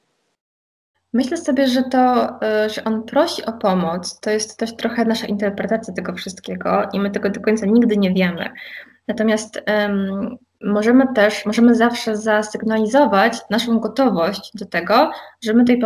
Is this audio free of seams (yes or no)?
no